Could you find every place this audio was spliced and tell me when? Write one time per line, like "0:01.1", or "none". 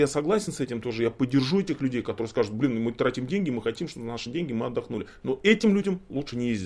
none